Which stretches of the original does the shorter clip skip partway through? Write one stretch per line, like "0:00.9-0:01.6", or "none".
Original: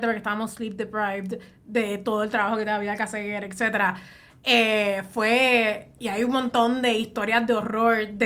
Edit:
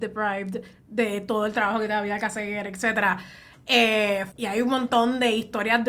0:05.1-0:05.9